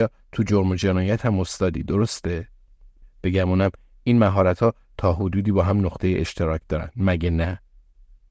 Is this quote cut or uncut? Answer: cut